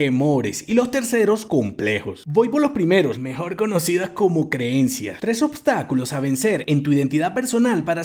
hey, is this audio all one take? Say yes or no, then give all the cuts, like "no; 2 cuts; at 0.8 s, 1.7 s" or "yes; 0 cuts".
no; 2 cuts; at 3.2 s, 5.2 s